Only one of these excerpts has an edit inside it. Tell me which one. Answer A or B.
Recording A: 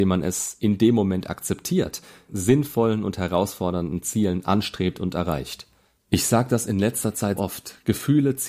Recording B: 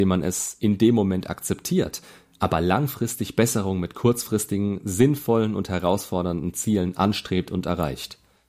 A